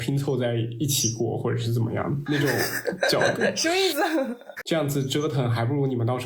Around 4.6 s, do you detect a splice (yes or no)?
yes